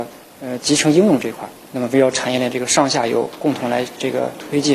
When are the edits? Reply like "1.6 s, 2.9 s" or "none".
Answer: 1.6 s